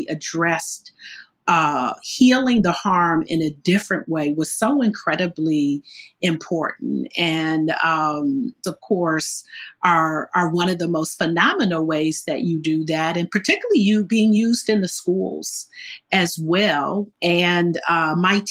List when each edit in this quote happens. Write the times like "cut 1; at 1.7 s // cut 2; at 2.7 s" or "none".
cut 1; at 8.6 s // cut 2; at 17.1 s